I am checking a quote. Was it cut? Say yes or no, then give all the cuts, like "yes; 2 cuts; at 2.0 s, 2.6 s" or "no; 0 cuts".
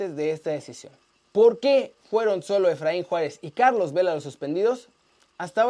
no; 0 cuts